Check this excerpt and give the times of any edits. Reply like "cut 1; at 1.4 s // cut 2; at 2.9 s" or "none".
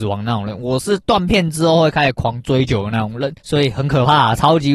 cut 1; at 3.4 s